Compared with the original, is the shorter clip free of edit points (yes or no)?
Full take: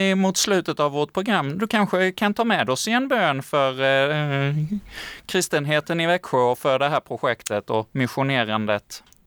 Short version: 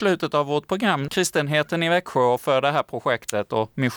no